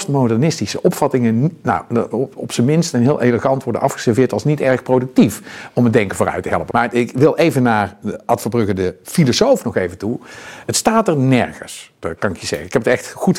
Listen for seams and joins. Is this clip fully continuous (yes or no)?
no